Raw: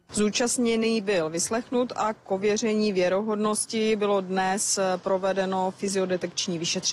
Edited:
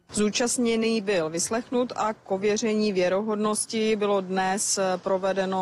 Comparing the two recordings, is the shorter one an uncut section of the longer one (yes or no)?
yes